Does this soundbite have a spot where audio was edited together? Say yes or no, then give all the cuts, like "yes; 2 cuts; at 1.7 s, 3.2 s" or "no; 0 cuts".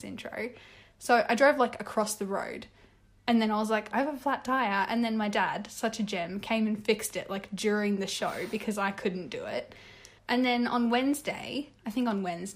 yes; 2 cuts; at 3.9 s, 10.2 s